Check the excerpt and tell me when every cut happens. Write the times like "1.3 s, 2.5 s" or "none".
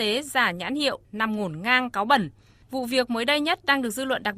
none